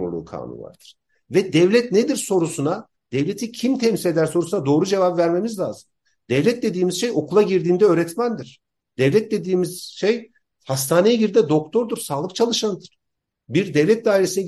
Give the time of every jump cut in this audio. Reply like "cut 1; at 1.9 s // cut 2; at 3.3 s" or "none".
none